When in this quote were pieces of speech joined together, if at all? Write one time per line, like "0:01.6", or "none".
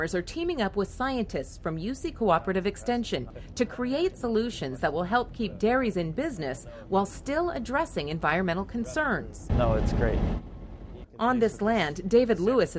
0:09.5

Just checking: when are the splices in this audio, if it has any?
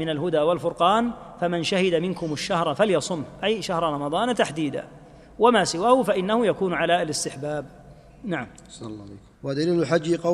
0:09.3

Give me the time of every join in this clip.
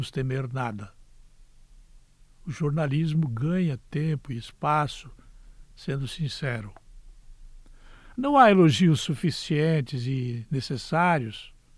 0:05.7
0:08.1

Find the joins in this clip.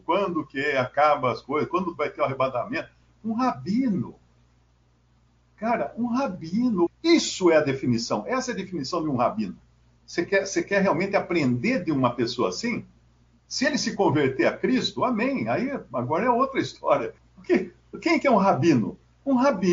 0:06.9
0:10.0
0:17.2

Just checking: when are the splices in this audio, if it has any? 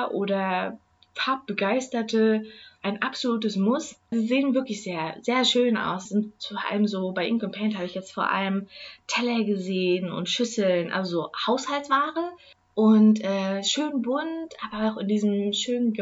0:04.1
0:06.1

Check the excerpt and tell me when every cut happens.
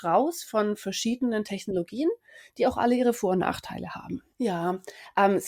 0:04.3

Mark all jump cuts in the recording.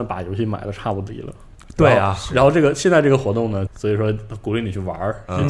0:01.6
0:03.7

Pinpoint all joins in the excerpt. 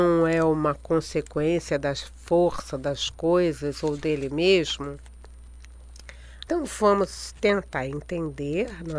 0:06.5

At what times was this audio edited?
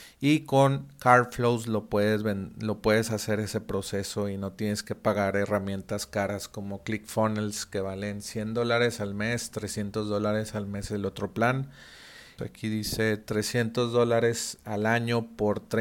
0:12.4

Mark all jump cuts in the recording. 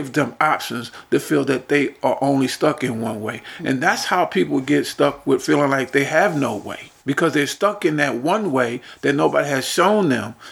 0:07.0

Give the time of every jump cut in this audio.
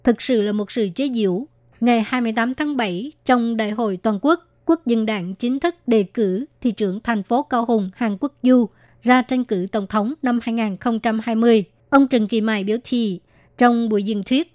0:01.7
0:11.8

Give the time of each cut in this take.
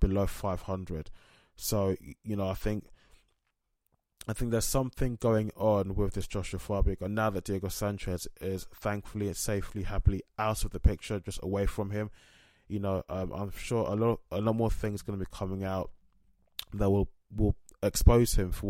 none

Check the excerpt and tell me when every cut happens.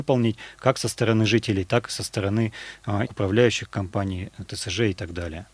0:03.0

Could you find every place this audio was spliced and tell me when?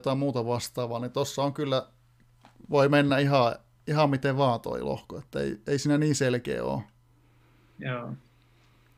none

